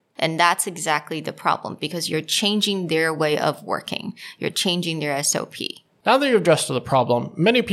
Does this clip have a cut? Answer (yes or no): no